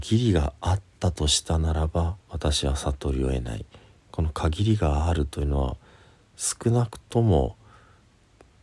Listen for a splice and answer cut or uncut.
cut